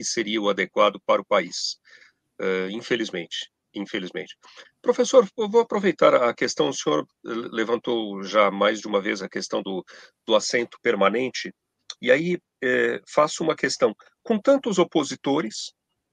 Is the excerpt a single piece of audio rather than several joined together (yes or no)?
yes